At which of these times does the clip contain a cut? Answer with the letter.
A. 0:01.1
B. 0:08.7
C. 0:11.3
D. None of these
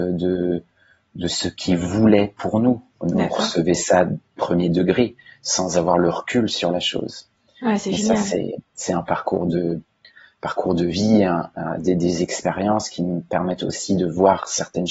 D